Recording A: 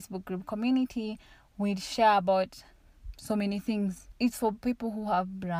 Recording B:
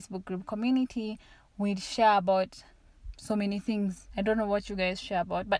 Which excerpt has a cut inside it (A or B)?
A